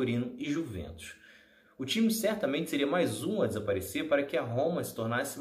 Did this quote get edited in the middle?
yes; 1 cut; at 1.6 s

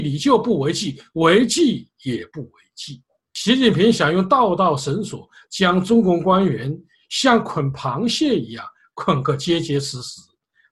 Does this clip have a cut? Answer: no; 0 cuts

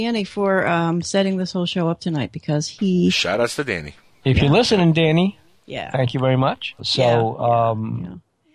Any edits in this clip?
yes; 2 cuts; at 4.2 s, 6.8 s

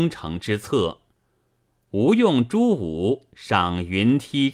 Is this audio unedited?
yes; 0 cuts

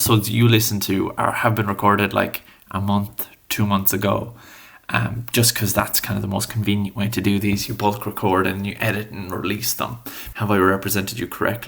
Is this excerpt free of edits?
no; 1 cut; at 10.3 s

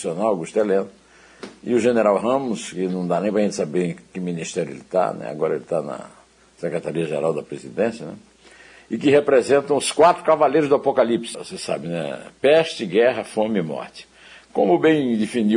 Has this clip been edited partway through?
yes; 1 cut; at 11.3 s

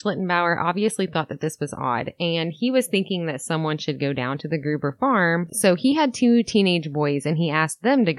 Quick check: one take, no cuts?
yes; 0 cuts

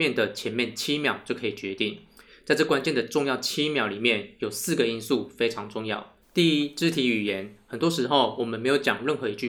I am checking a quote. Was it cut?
yes; 1 cut; at 6.2 s

